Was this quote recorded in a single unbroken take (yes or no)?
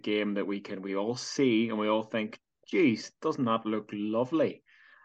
yes